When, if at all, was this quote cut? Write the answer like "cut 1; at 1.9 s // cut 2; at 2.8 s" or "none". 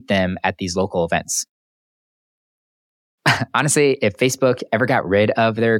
cut 1; at 2.4 s